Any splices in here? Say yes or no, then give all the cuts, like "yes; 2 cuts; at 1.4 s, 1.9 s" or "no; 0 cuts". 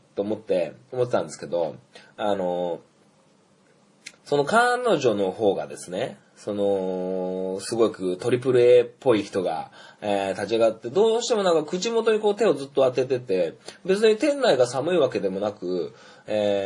yes; 1 cut; at 4.2 s